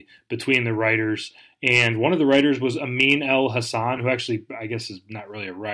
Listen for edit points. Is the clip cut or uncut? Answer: uncut